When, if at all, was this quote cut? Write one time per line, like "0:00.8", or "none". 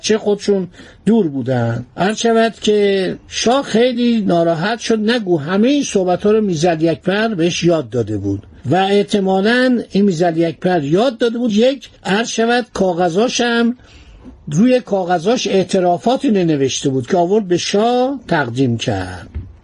0:12.0